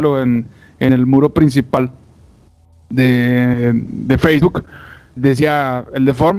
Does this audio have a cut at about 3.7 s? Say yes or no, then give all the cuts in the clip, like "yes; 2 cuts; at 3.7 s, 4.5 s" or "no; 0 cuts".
no; 1 cut; at 5.2 s